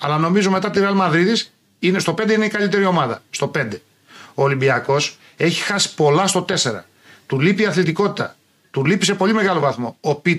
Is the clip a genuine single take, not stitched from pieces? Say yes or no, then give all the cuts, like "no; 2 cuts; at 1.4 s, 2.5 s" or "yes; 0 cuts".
yes; 0 cuts